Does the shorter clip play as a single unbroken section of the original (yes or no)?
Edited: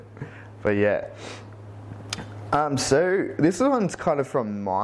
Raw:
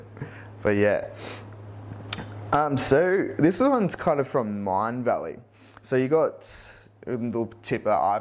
yes